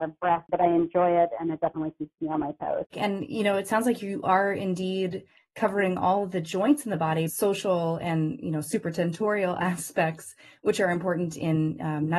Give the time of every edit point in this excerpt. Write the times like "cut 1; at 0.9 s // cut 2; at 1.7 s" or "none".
cut 1; at 2.9 s // cut 2; at 7.3 s